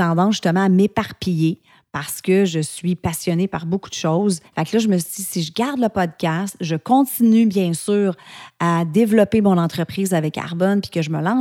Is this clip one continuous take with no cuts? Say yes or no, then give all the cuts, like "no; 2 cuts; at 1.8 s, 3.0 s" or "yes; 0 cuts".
no; 1 cut; at 4.5 s